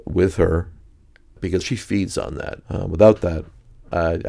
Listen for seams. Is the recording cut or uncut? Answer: cut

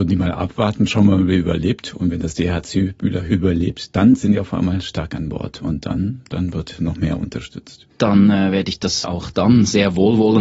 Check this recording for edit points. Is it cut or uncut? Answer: uncut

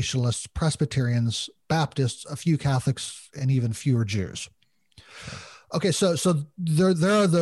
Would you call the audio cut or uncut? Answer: uncut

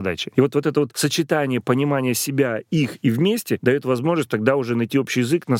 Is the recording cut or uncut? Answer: uncut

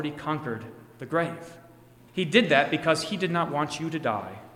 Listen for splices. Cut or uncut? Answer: cut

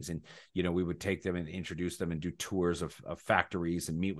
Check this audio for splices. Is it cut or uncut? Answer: uncut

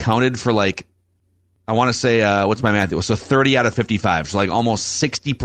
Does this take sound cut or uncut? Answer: uncut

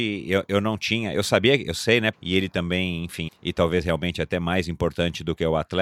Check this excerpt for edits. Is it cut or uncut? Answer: cut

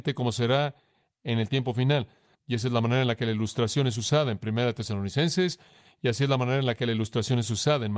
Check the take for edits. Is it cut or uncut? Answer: cut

